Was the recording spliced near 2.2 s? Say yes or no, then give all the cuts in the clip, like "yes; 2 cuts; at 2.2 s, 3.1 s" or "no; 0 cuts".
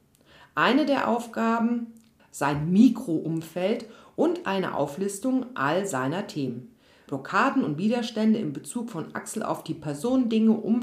yes; 2 cuts; at 2.2 s, 7.1 s